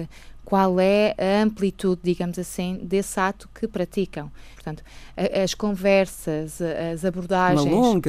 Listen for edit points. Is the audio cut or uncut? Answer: cut